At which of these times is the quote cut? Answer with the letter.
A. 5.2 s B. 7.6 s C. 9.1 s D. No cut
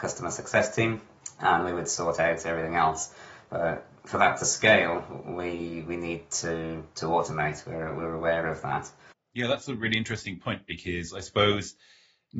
C